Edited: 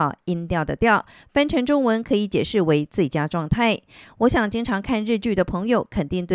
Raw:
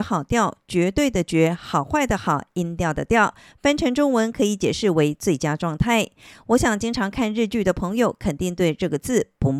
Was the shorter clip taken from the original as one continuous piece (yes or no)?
yes